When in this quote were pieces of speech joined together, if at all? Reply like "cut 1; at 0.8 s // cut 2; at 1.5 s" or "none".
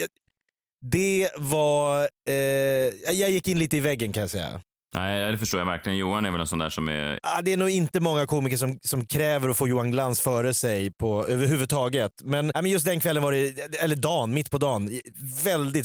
cut 1; at 7.2 s // cut 2; at 12.5 s